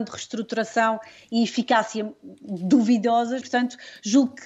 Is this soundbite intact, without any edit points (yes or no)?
no